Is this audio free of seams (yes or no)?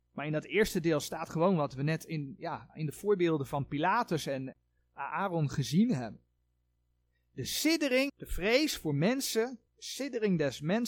no